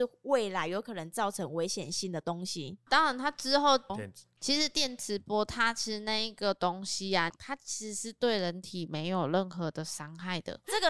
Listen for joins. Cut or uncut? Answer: cut